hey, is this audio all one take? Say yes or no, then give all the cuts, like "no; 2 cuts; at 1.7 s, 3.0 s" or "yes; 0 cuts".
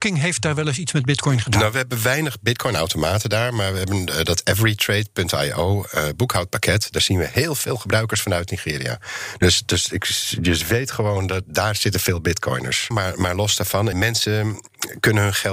no; 2 cuts; at 12.9 s, 13.9 s